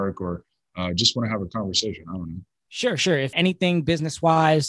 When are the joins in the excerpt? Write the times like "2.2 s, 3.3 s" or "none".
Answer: 3.3 s

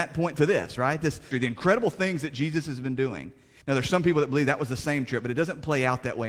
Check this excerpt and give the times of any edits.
1.3 s, 3.6 s

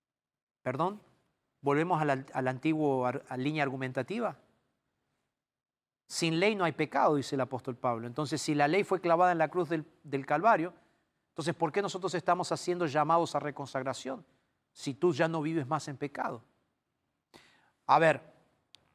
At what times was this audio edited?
none

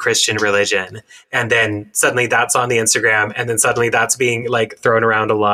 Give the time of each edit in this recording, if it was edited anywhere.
none

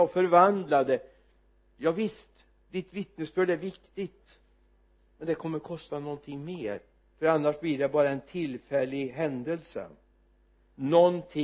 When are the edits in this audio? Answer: none

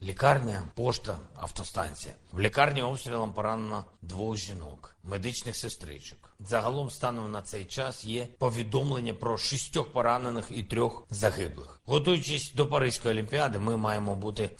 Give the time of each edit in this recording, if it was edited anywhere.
11.8 s

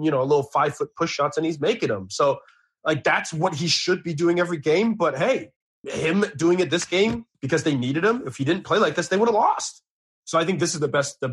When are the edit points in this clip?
5.8 s, 7.3 s

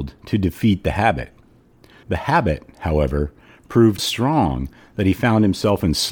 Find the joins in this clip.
2.0 s, 4.0 s

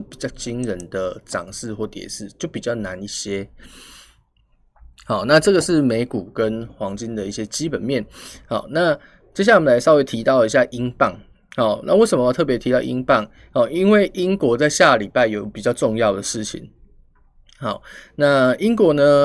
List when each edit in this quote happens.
none

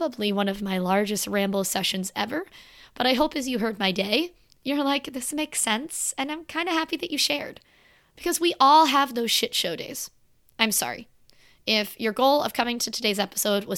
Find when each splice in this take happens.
none

